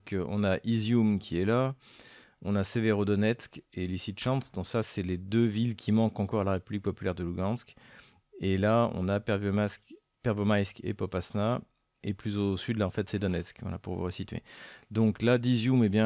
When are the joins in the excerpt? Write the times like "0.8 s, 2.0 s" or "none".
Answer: none

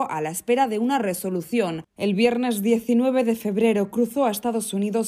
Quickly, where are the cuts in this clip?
1.8 s

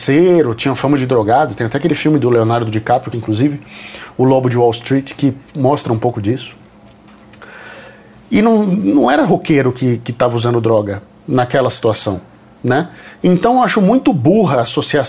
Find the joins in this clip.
3.1 s

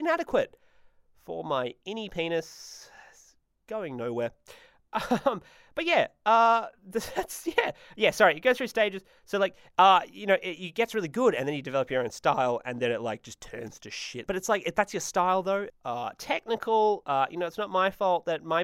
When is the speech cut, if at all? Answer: 14.3 s, 15.7 s, 17.0 s

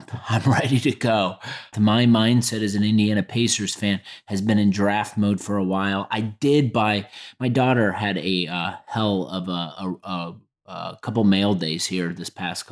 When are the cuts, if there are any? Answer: 1.7 s

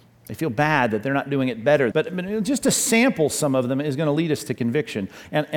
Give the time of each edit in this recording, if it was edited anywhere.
1.9 s

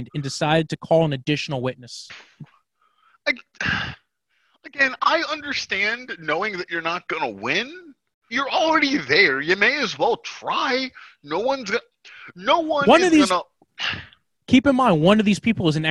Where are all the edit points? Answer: 8.3 s

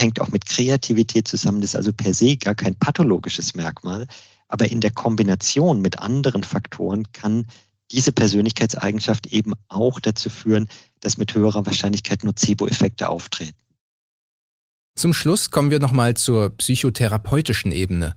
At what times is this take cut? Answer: none

